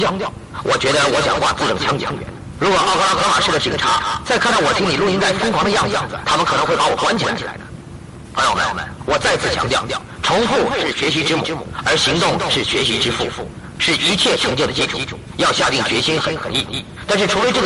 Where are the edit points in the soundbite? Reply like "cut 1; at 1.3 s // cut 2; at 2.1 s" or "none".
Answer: cut 1; at 2.6 s

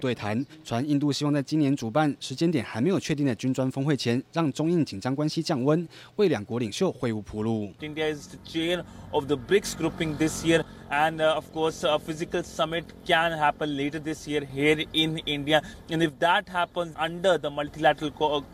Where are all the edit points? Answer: cut 1; at 16.9 s

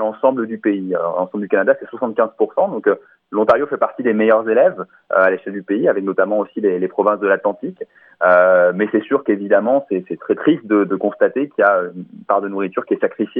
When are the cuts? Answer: none

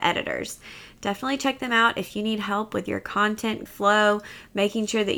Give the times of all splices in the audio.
cut 1; at 3.7 s

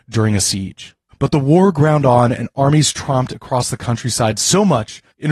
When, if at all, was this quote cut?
cut 1; at 1.1 s

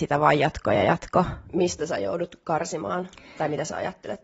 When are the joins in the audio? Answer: cut 1; at 1.5 s

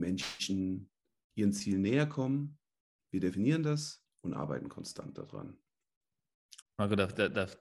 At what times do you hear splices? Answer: cut 1; at 4.1 s // cut 2; at 6.6 s

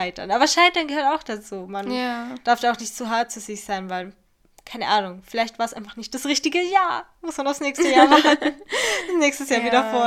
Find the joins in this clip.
none

